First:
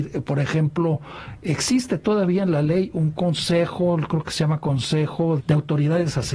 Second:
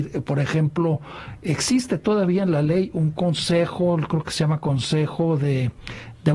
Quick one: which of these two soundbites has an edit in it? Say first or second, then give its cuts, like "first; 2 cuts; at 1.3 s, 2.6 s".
first; 1 cut; at 5.4 s